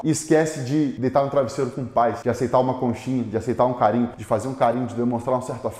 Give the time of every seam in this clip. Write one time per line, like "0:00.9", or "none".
none

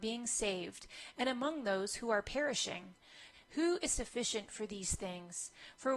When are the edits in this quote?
0:03.3

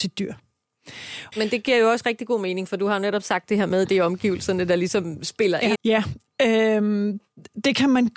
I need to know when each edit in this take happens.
0:01.3
0:05.7

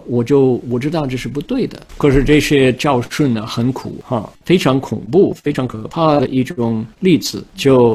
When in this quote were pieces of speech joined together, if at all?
0:01.9
0:04.4

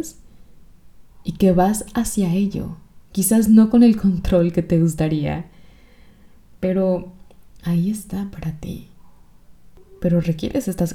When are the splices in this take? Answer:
none

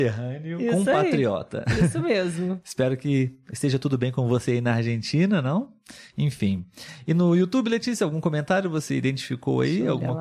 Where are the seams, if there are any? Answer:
none

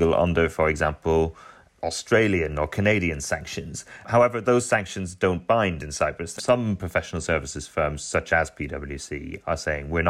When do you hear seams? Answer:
0:06.4

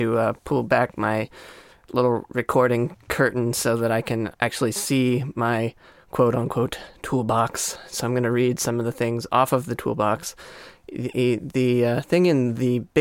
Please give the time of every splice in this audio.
0:04.3

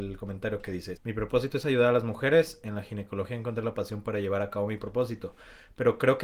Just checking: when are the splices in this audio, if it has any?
0:01.0

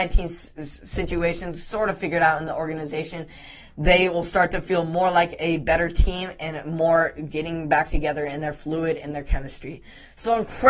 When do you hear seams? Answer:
none

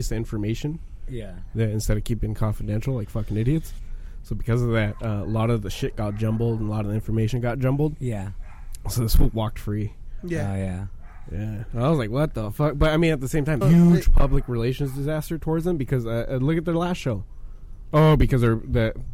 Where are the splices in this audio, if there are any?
0:13.6
0:17.9

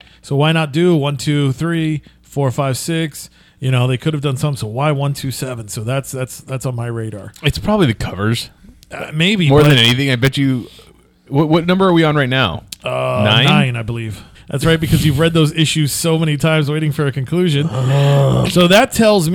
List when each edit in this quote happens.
0:14.3
0:18.5

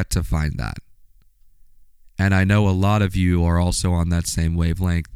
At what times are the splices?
none

